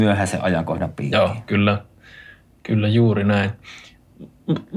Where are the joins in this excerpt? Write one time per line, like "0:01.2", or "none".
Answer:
none